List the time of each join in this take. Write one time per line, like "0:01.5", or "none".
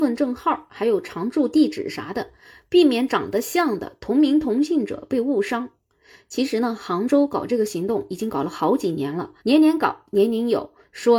0:09.4